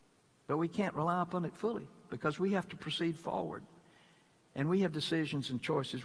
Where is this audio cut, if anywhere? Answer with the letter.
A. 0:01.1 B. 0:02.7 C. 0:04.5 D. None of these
D